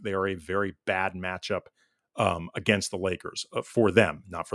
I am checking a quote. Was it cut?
no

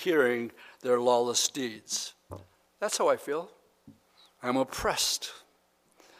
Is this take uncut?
no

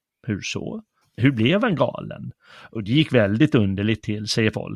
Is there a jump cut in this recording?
yes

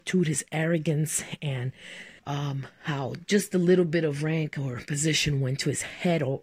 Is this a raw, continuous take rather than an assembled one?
no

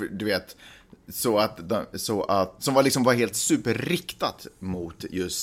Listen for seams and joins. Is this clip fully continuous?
no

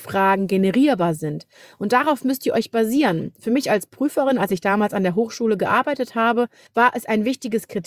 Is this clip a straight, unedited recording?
yes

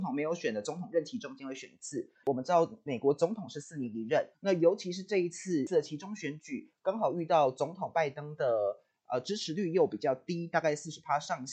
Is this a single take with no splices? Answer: no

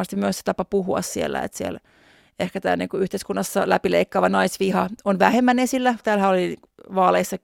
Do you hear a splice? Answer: yes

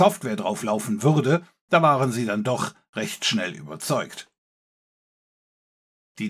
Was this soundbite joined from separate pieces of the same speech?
no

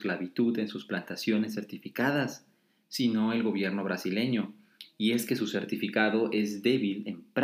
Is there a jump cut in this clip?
no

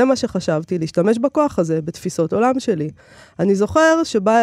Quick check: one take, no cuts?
yes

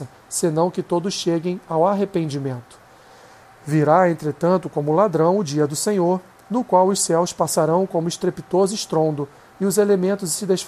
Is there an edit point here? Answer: no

